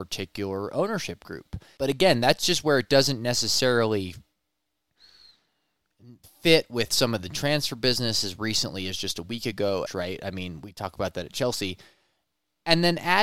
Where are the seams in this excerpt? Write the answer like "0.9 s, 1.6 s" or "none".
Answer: 1.8 s, 9.9 s